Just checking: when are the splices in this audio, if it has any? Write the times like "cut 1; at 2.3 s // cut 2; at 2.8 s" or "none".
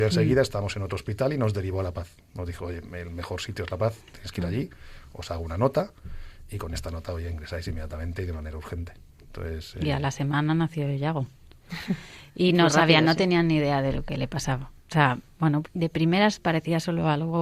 cut 1; at 15.6 s